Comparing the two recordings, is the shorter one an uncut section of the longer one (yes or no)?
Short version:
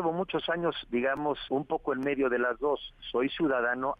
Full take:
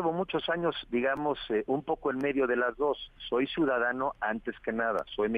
no